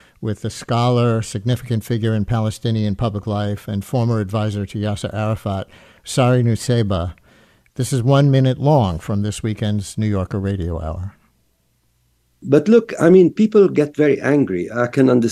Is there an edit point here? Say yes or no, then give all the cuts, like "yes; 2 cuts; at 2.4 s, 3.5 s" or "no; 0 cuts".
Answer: no; 0 cuts